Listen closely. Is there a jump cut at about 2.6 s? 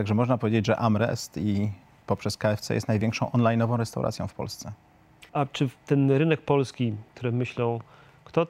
no; 2 cuts; at 5.3 s, 7.1 s

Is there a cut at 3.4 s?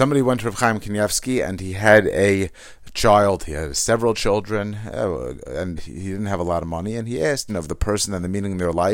no; 2 cuts; at 5.8 s, 7.5 s

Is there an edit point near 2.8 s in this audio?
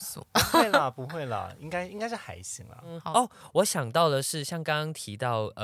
no; 0 cuts

